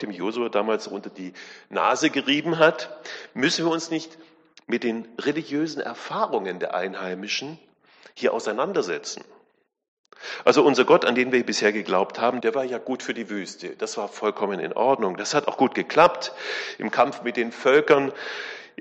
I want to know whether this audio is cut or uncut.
cut